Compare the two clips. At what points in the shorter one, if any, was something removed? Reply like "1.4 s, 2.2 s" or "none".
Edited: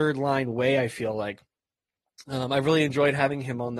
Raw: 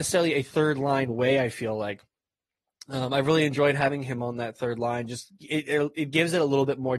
none

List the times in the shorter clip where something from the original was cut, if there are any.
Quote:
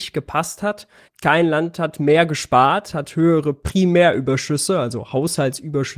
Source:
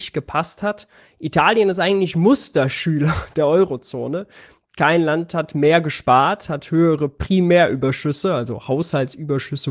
1.1 s

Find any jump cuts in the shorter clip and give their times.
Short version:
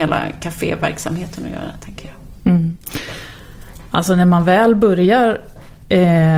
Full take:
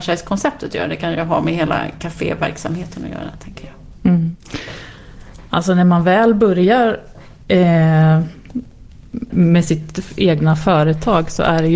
none

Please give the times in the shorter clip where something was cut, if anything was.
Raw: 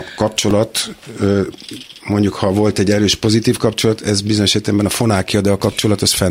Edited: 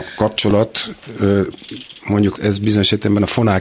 2.3 s

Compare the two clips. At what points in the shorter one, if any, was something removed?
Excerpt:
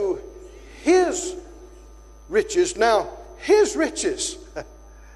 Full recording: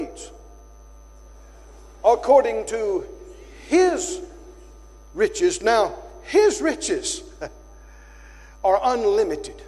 none

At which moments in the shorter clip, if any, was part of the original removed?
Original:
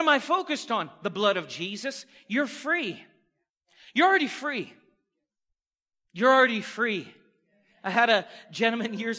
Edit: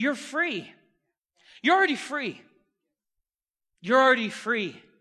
none

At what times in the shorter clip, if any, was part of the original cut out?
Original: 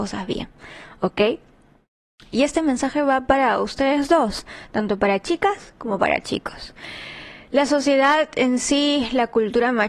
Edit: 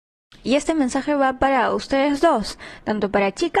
none

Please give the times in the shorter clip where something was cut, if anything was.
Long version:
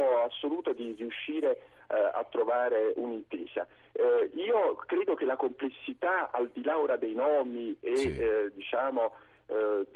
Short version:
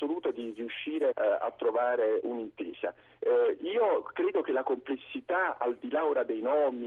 1.1 s

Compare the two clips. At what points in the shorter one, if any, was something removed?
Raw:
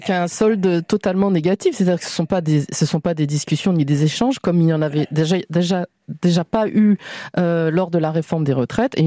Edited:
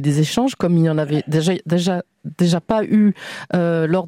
none

